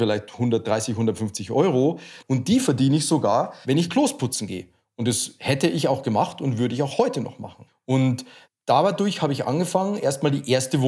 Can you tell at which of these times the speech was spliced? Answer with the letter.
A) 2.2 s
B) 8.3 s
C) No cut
A